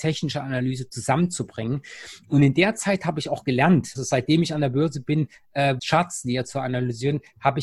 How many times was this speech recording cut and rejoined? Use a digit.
2